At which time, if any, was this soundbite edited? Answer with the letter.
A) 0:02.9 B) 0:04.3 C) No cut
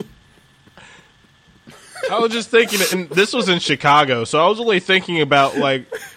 C